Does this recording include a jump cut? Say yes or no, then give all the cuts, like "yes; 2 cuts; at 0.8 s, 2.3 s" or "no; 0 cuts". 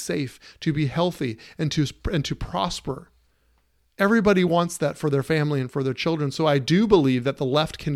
no; 0 cuts